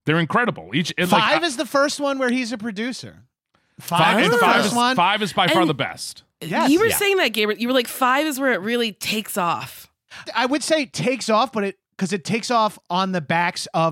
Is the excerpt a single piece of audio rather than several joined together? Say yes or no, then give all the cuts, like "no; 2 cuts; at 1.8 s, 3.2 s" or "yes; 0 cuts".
no; 1 cut; at 10.3 s